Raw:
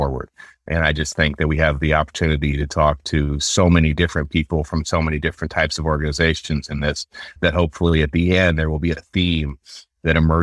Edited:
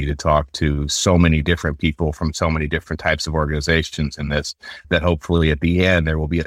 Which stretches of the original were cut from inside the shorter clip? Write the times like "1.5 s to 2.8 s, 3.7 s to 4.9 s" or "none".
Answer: none

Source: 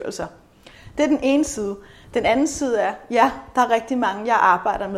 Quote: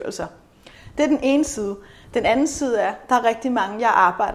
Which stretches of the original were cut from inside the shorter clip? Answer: 3.1 s to 3.5 s

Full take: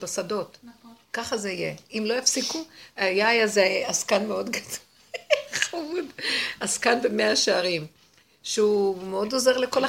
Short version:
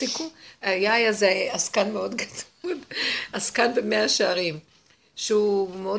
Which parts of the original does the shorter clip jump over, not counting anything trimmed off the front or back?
5.0 s to 5.9 s

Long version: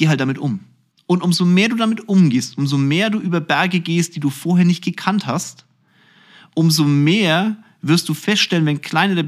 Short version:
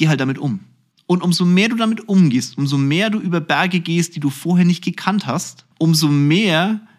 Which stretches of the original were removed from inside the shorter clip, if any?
5.7 s to 6.5 s

